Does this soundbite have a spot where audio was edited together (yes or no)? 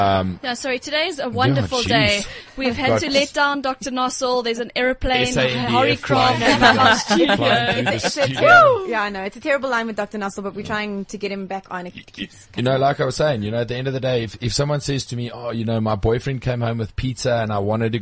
no